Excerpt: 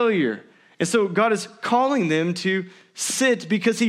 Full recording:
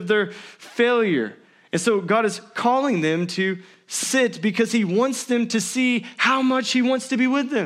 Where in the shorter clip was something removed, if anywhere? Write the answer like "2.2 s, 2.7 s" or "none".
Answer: none